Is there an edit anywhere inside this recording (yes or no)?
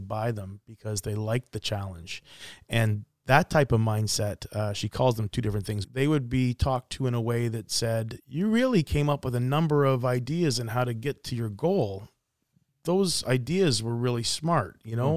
yes